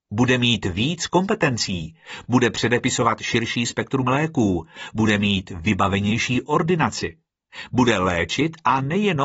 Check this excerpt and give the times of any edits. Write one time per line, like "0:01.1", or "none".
none